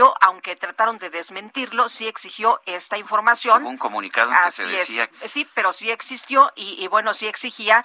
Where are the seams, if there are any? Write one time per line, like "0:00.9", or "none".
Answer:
0:05.1